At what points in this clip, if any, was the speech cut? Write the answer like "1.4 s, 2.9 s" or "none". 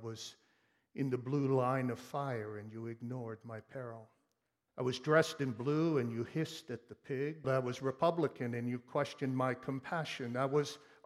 4.7 s, 7.4 s